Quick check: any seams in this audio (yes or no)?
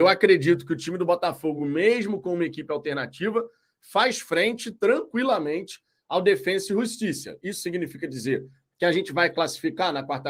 no